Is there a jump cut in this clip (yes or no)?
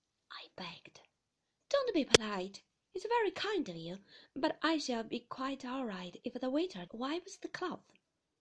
yes